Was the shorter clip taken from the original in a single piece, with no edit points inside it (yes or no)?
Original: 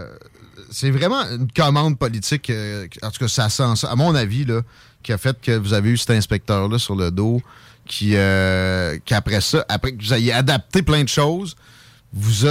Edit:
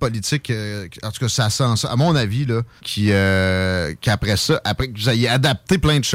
no